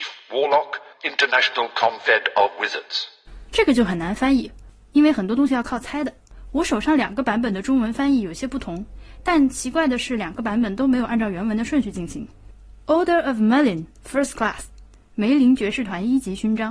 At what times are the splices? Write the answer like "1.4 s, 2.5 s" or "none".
0.9 s